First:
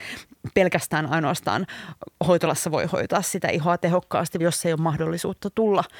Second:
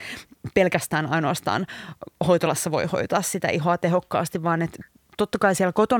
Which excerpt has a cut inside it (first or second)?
first